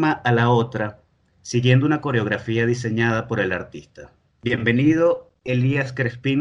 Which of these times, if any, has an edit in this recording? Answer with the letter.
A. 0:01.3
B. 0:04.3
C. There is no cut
B